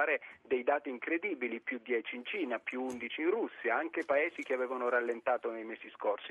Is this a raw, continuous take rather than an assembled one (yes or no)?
yes